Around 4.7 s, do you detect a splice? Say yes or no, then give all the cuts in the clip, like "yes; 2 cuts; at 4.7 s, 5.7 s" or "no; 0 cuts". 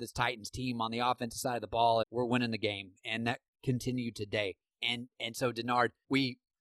no; 1 cut; at 2.0 s